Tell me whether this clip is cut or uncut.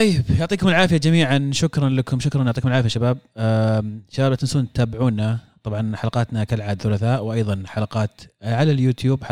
cut